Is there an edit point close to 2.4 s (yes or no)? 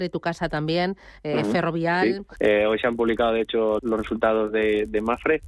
yes